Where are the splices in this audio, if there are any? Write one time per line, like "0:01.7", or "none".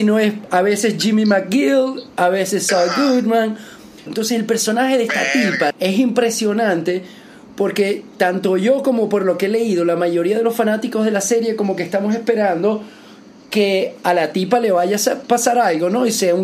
0:04.1
0:05.7